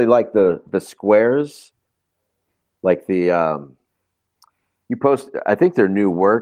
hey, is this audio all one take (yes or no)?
yes